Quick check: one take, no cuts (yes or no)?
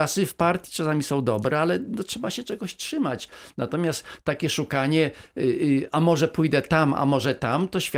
yes